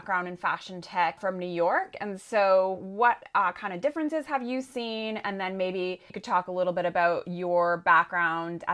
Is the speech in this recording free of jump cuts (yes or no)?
yes